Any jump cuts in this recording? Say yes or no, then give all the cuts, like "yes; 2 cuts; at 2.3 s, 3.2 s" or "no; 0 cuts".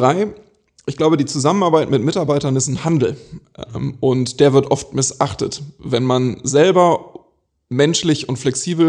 no; 0 cuts